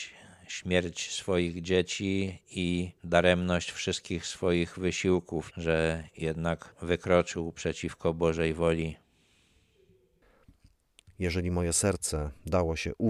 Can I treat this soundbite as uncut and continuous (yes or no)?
no